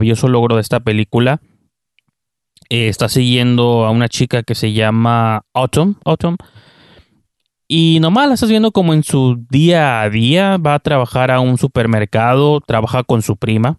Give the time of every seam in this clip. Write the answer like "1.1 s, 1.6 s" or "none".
6.0 s